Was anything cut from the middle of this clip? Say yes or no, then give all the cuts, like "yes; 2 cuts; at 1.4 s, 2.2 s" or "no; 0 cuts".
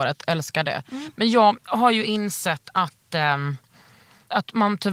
no; 0 cuts